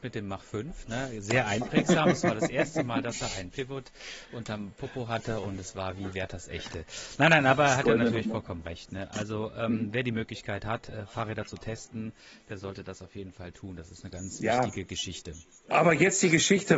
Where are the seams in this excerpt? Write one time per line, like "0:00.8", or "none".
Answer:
0:14.1
0:15.7